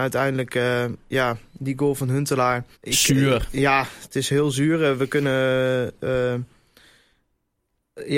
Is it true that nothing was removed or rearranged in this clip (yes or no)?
no